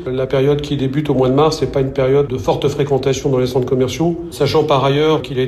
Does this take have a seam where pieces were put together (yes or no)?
no